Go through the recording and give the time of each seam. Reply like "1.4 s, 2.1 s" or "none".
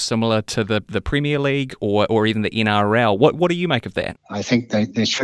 4.2 s